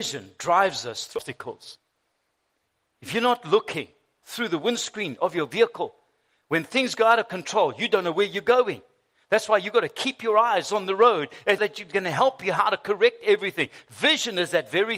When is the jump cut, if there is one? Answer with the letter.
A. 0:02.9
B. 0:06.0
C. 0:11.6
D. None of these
C